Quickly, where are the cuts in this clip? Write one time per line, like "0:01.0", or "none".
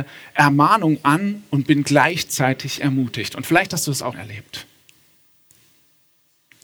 0:04.1

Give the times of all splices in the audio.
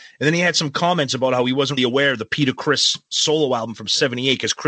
0:01.8

